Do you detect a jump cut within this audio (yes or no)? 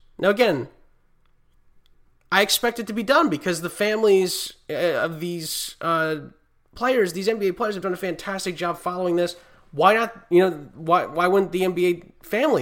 no